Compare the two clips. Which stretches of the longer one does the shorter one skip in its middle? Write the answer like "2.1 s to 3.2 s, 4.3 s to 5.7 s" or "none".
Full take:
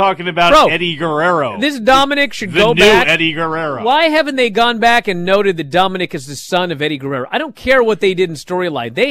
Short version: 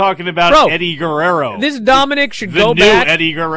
none